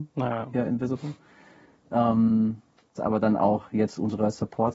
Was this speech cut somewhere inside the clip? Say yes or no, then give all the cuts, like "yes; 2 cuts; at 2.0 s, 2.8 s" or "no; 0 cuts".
yes; 1 cut; at 3.0 s